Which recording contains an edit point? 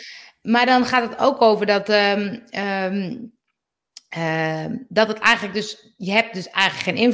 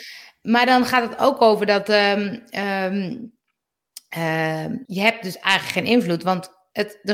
second; 1 cut; at 4.9 s

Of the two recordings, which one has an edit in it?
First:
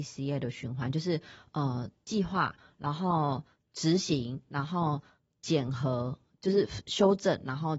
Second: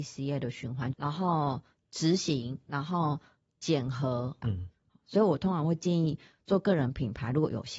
second; 2 cuts; at 0.9 s, 4.4 s

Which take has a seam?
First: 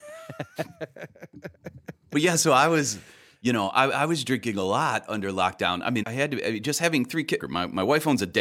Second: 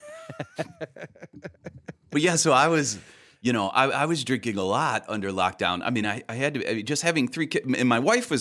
first; 2 cuts; at 6.0 s, 7.4 s

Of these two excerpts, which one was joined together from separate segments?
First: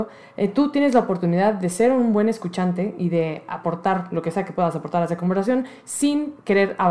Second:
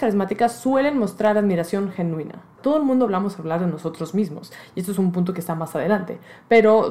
second; 1 cut; at 2.6 s

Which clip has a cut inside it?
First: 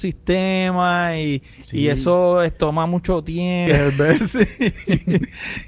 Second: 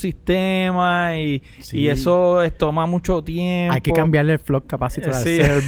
first; 1 cut; at 3.7 s

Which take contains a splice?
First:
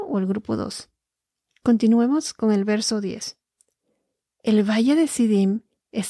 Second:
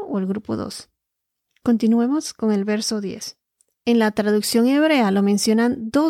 second; 1 cut; at 3.7 s

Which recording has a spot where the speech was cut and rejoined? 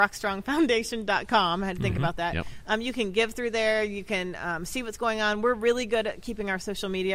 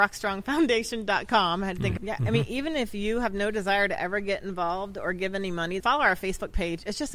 second; 2 cuts; at 2.0 s, 5.8 s

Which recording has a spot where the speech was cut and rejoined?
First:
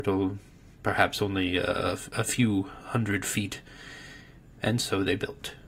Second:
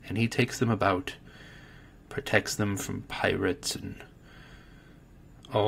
first; 1 cut; at 4.6 s

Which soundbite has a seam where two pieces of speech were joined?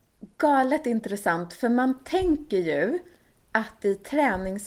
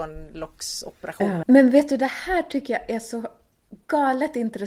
second; 1 cut; at 1.4 s

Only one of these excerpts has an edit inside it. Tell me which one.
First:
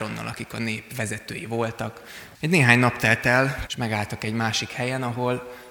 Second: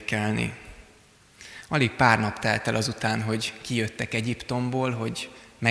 first; 2 cuts; at 2.3 s, 3.7 s

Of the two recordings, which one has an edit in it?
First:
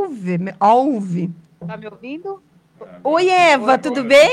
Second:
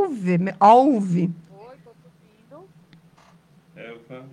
first; 1 cut; at 1.5 s

